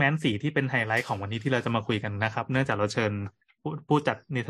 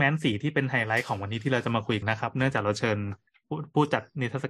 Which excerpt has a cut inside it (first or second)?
second